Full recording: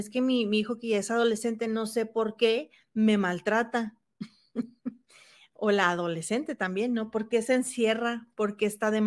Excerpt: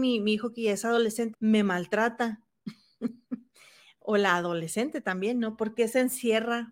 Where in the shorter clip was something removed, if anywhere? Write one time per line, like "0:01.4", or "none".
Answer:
0:01.3

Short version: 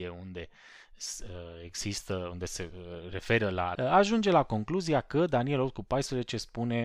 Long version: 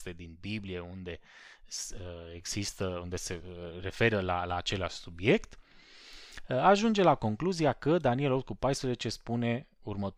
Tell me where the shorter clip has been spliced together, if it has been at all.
0:03.8

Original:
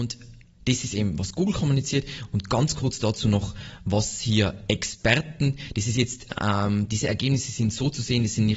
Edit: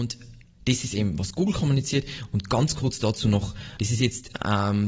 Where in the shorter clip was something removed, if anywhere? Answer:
0:03.8

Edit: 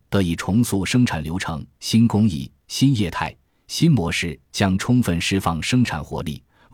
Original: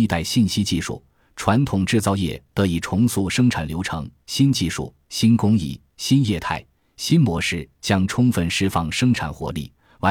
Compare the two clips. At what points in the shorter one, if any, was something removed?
0:01.8

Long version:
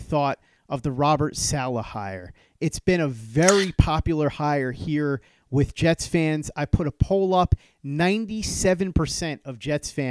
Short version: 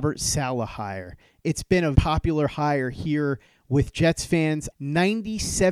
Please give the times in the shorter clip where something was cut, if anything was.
0:01.9
0:04.7

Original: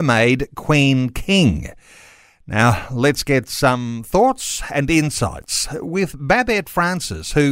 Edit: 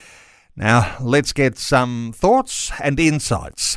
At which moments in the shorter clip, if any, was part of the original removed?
none

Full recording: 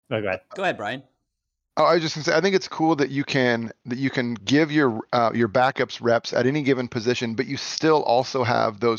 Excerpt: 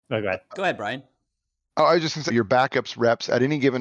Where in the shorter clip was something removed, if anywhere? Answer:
0:02.3

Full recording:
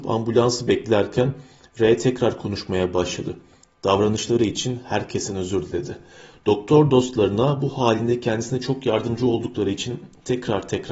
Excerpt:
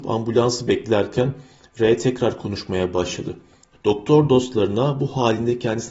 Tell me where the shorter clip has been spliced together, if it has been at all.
0:03.7

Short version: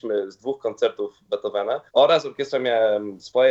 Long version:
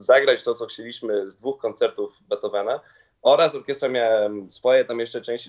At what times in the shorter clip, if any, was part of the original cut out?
0:01.9

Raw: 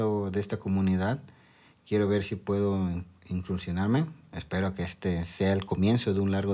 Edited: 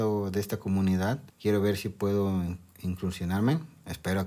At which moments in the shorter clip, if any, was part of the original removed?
0:01.3

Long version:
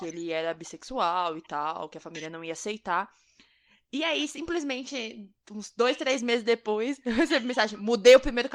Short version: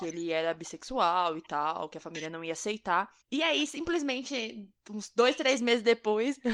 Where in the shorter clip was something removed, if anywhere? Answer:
0:03.2

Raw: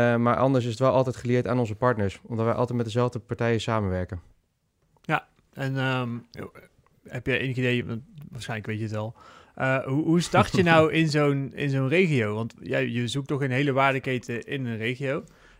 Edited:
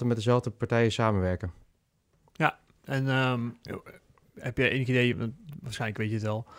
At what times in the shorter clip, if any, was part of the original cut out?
none

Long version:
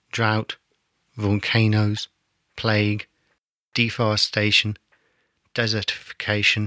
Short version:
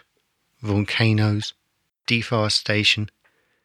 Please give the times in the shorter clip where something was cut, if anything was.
0:01.9

